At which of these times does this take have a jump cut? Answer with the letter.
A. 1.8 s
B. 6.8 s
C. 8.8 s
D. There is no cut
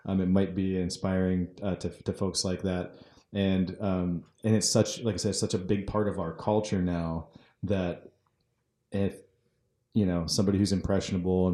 D